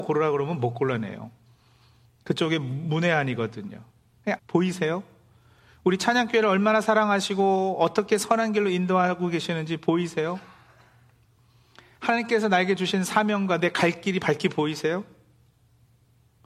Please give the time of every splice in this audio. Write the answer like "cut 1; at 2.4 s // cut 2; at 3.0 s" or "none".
cut 1; at 4.4 s